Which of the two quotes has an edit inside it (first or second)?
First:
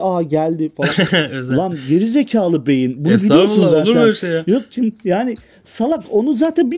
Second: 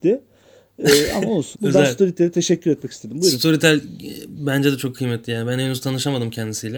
second